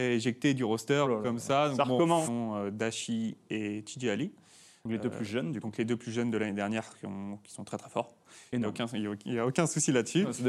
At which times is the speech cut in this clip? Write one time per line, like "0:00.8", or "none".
0:01.0
0:02.2